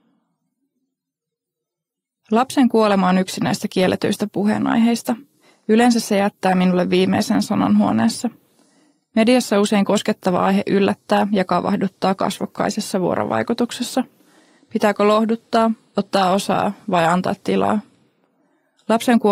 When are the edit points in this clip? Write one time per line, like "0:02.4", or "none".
none